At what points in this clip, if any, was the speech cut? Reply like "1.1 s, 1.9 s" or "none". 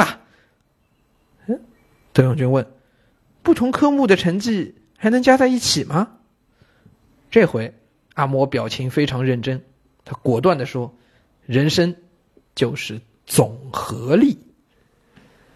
none